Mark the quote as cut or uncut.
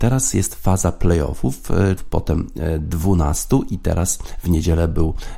cut